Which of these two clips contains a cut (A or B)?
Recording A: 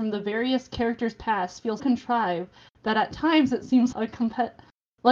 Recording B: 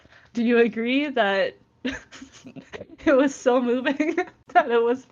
A